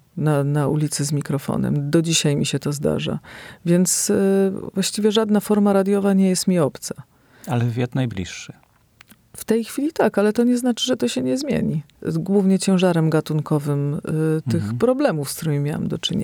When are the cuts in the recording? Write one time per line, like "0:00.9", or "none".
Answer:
0:11.9